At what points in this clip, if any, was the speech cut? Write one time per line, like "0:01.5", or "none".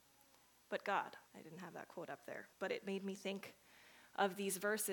0:01.3
0:02.5